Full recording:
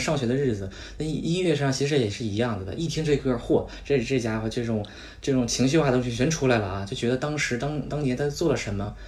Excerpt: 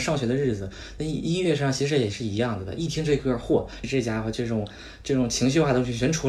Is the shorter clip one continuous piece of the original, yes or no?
no